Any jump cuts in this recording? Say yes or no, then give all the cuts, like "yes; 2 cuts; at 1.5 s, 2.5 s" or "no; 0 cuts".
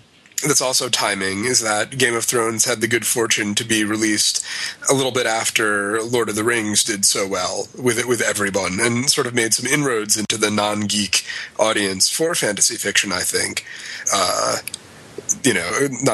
yes; 1 cut; at 14.1 s